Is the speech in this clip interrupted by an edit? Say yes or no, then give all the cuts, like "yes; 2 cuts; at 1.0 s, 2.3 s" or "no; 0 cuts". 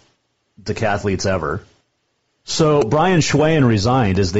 yes; 1 cut; at 2.4 s